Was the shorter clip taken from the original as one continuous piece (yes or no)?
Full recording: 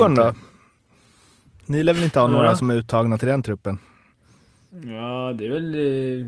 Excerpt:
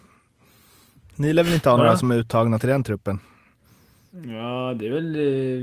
no